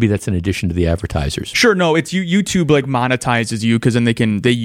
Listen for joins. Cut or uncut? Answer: uncut